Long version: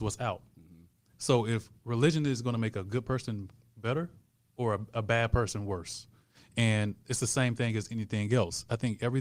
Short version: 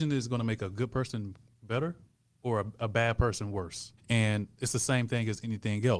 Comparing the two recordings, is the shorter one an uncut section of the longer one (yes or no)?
no